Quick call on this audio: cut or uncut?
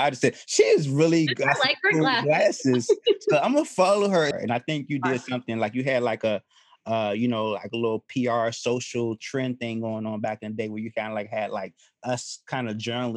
cut